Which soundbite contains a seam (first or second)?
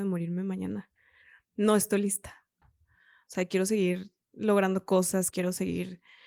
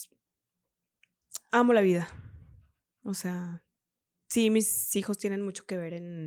first